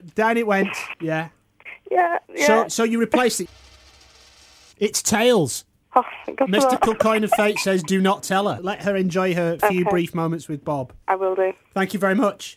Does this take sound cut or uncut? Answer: cut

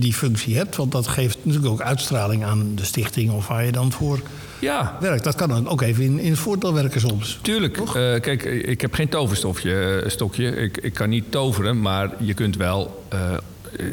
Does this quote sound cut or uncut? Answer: uncut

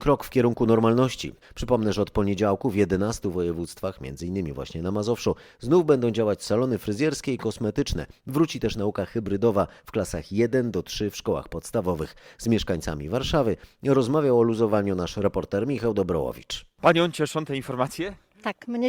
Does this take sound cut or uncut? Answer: cut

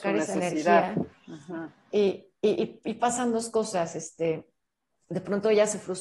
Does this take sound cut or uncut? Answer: uncut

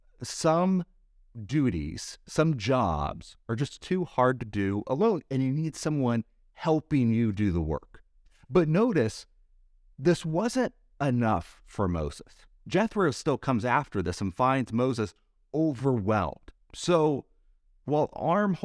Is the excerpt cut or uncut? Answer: uncut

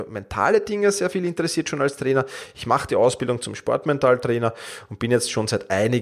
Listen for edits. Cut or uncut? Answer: uncut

